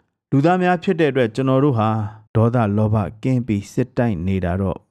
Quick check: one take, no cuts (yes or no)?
no